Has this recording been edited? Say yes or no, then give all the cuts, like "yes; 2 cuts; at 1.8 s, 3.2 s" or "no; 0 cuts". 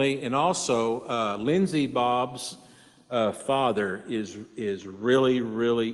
no; 0 cuts